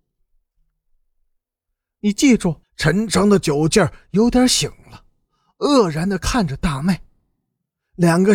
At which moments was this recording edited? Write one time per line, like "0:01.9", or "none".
0:02.6

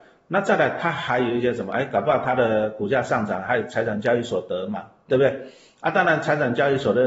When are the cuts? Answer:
none

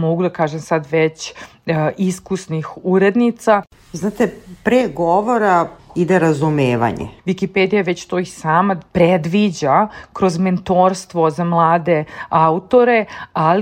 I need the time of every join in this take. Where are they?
0:05.8
0:07.2
0:08.9

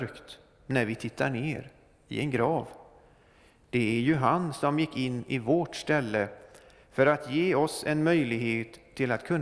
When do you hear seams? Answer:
0:03.6

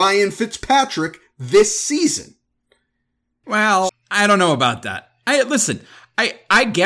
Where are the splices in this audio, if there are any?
0:03.9

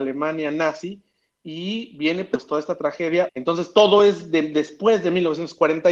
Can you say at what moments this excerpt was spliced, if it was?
0:03.3

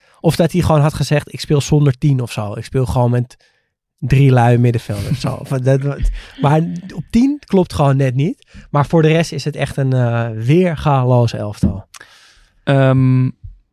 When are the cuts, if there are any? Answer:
none

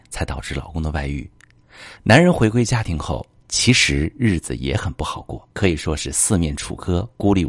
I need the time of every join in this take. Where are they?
0:02.0
0:05.5

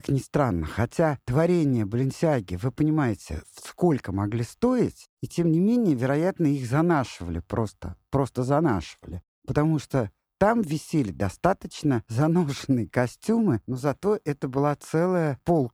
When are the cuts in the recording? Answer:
none

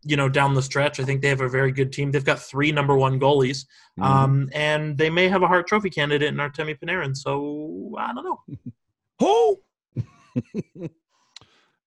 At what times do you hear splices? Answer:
none

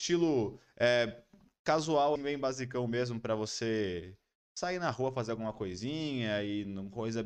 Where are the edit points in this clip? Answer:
0:02.2

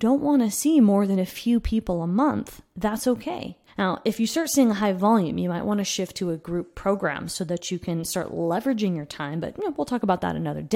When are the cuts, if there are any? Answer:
0:03.7

